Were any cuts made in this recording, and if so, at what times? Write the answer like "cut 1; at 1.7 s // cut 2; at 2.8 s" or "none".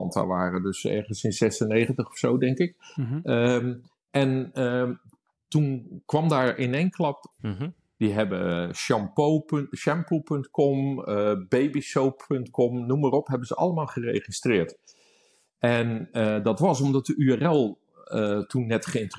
cut 1; at 7.3 s